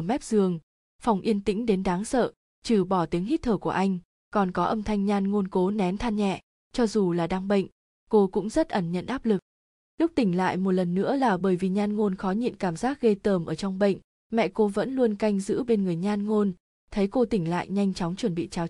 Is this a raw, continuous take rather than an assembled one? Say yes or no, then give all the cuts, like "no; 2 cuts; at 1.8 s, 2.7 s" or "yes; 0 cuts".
yes; 0 cuts